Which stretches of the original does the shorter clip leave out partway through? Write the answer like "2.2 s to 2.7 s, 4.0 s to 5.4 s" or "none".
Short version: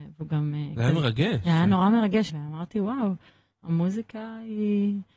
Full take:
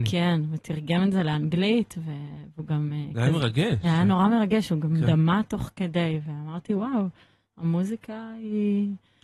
4.7 s to 6.2 s